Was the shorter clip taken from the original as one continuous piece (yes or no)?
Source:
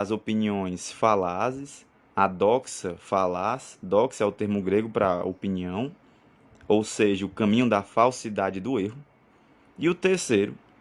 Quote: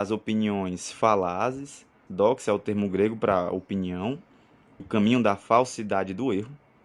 no